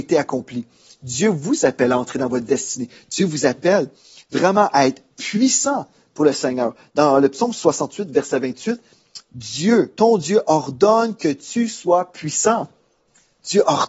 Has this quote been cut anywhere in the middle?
no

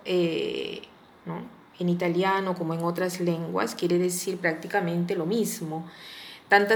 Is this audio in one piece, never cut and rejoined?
no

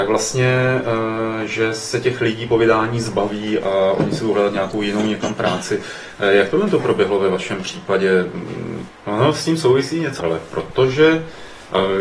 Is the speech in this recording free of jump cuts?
no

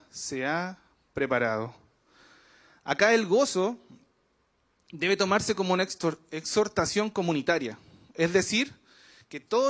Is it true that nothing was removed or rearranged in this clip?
yes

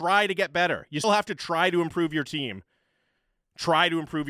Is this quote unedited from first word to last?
no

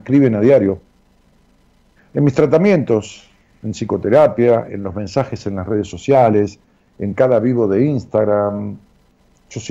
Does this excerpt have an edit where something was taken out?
yes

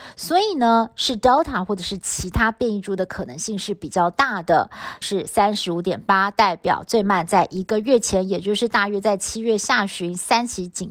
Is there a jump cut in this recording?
yes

